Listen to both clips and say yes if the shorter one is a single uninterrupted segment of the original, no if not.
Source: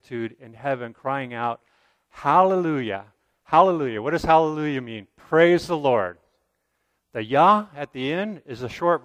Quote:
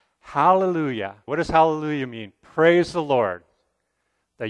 no